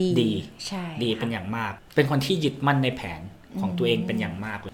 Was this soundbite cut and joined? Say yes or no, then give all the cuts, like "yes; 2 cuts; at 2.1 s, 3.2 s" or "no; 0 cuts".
no; 0 cuts